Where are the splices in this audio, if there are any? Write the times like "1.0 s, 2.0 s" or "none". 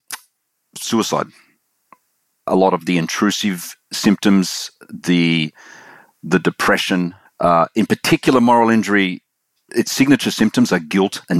7.2 s